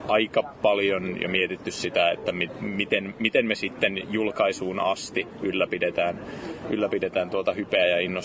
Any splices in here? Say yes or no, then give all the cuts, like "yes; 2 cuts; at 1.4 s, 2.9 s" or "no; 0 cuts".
no; 0 cuts